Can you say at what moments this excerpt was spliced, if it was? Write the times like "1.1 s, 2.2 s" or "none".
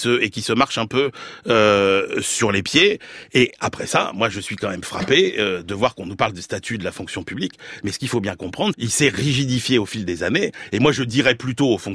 8.7 s

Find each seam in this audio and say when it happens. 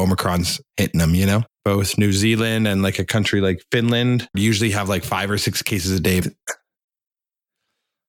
1.5 s, 4.3 s, 6.2 s

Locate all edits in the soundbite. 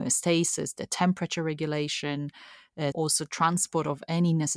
2.9 s

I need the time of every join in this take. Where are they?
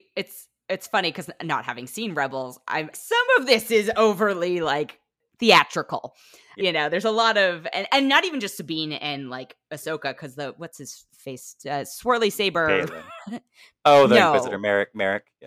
2.9 s, 6.6 s

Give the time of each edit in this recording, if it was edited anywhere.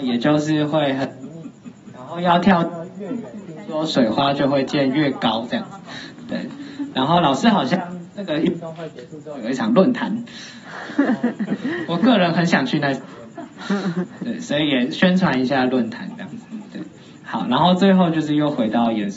none

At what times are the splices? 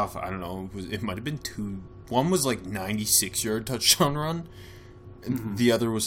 none

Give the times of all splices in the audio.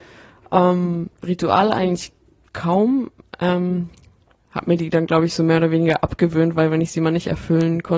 none

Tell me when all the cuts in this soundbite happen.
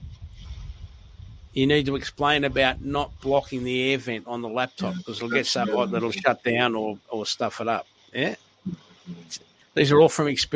none

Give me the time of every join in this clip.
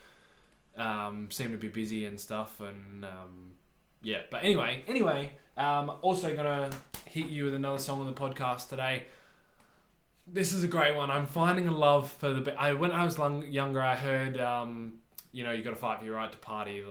none

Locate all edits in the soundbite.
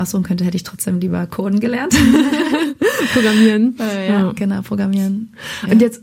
none

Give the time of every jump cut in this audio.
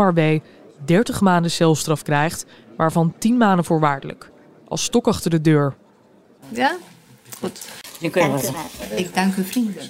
6.4 s

